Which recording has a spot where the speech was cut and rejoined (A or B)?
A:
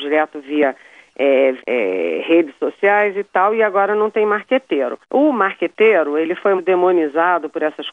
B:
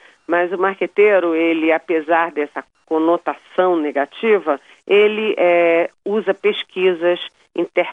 A